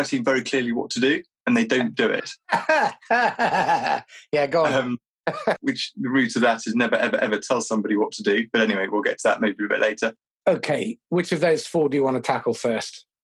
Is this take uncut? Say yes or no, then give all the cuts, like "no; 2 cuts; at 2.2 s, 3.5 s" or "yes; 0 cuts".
no; 2 cuts; at 5.6 s, 10.4 s